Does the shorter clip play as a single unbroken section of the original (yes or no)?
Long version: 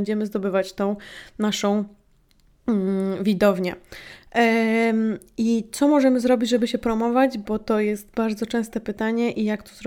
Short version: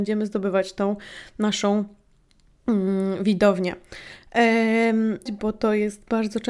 no